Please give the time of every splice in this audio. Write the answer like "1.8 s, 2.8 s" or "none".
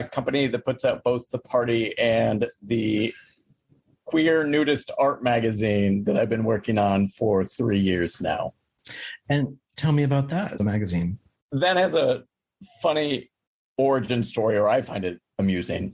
10.6 s